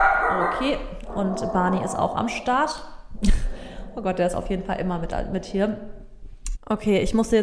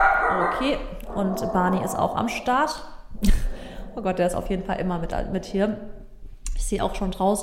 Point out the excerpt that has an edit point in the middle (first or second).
first